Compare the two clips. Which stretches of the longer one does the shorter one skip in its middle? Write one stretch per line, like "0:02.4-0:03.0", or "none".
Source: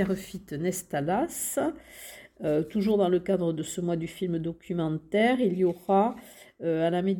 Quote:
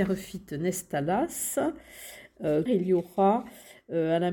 0:02.7-0:05.4